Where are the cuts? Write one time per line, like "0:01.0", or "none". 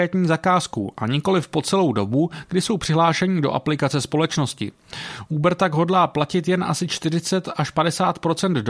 none